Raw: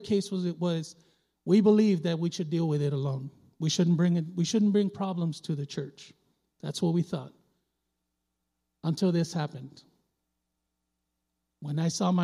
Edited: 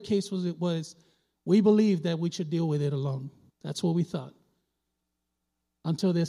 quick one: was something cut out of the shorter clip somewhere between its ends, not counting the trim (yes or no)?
yes